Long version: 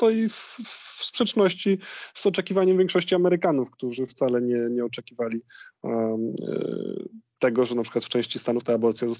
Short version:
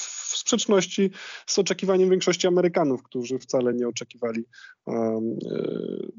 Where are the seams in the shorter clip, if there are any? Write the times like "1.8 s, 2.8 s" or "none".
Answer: 3.7 s